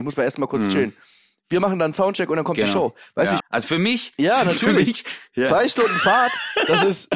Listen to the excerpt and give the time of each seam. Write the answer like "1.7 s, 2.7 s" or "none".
3.4 s

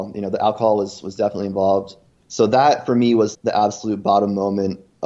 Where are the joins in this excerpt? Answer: 2.2 s, 3.3 s

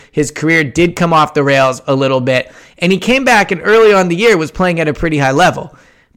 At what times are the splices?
none

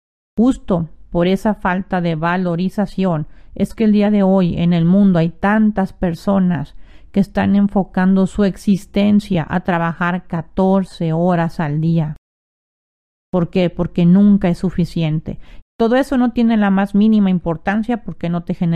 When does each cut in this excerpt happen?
15.6 s

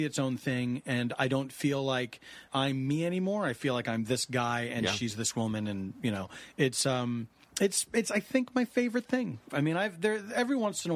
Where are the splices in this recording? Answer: 2.5 s, 9.5 s

